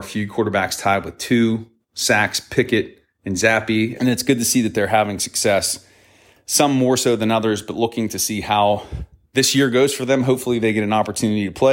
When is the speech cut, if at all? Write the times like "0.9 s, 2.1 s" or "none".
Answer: 4.0 s